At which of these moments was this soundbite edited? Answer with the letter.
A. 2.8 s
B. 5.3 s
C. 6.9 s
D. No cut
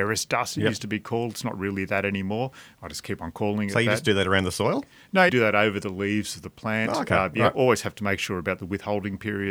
B